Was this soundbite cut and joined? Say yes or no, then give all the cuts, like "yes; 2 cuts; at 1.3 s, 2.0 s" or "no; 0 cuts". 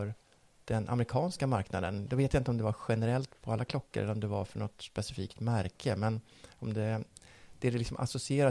no; 0 cuts